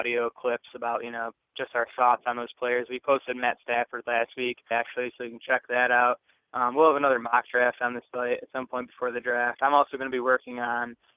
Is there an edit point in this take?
yes; 1 cut; at 4.7 s

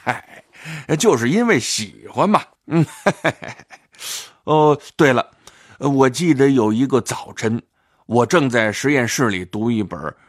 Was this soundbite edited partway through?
yes; 1 cut; at 2.6 s

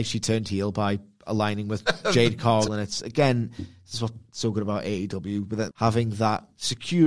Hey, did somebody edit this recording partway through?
yes; 2 cuts; at 2.7 s, 5.7 s

